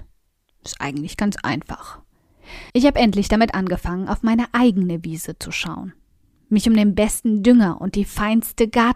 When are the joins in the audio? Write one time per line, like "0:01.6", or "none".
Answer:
0:02.7